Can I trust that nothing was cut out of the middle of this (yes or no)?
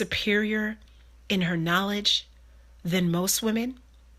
yes